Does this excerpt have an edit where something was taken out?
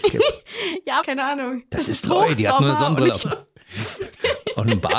yes; 2 cuts; at 1.0 s, 3.2 s

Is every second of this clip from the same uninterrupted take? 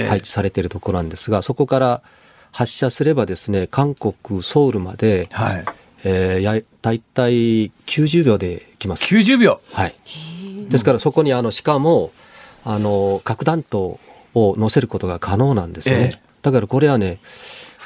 yes; 0 cuts

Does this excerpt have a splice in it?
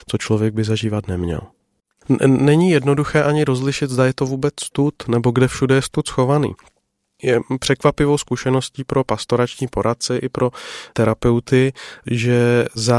yes; 1 cut; at 2.0 s

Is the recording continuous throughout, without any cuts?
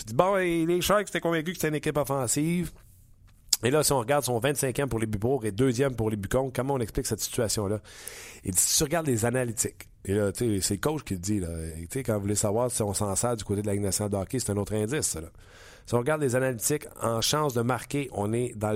yes; 0 cuts

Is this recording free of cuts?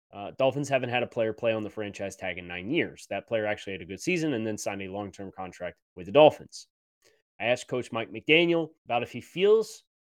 no; 2 cuts; at 5.8 s, 8.8 s

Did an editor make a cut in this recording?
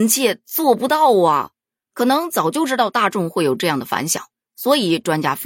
no; 0 cuts

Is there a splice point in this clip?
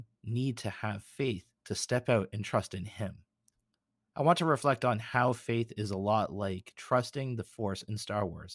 no; 0 cuts

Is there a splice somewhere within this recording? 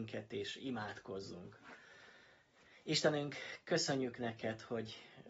no; 0 cuts

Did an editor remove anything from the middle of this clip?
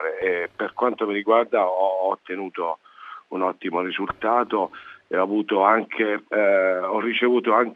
yes; 1 cut; at 6.3 s

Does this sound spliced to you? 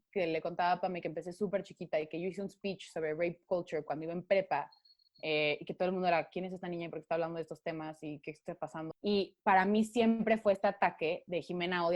yes; 1 cut; at 8.9 s

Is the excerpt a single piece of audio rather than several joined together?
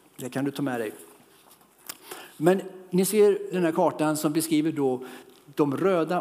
no; 1 cut; at 3.5 s

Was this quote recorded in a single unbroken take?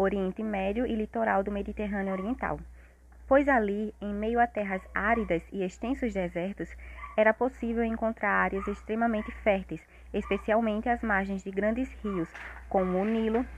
yes; 0 cuts

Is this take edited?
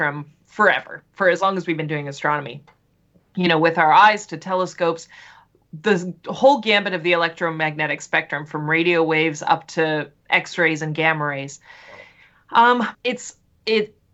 yes; 1 cut; at 12.9 s

